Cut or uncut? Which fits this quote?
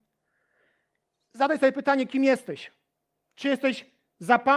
uncut